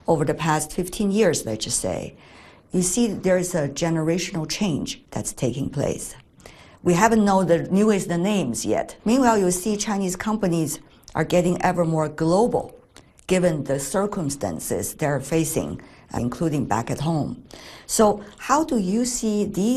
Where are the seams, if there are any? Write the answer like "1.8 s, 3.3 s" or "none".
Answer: 9.0 s, 16.2 s